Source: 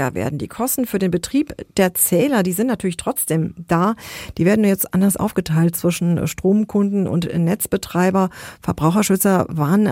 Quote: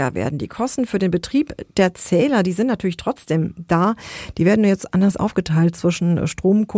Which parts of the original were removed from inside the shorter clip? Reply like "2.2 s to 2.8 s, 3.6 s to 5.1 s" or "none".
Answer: none